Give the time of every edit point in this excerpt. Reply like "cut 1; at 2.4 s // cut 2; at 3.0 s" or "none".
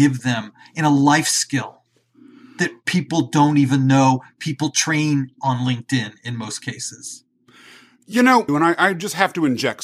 cut 1; at 8.5 s